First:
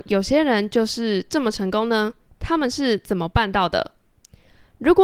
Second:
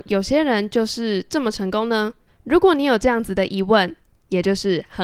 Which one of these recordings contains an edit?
second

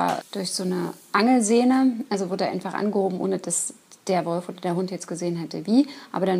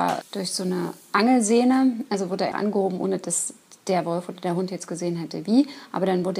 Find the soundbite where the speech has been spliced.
second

